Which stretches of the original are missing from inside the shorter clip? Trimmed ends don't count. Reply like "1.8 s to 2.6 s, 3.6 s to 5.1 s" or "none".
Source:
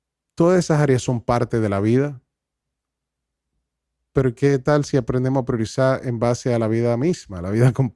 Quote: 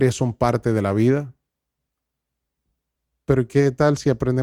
none